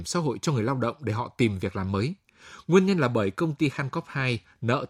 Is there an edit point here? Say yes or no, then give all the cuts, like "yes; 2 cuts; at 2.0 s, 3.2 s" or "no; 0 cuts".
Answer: no; 0 cuts